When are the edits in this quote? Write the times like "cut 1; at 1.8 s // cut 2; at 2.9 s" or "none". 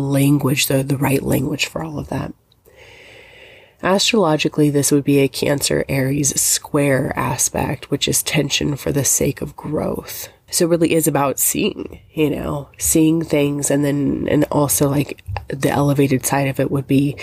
cut 1; at 10.5 s